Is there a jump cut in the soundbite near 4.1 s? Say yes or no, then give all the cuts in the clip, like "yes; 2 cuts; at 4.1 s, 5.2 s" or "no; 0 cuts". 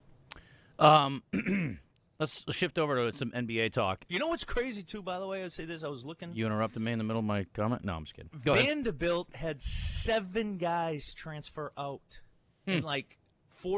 yes; 1 cut; at 4.1 s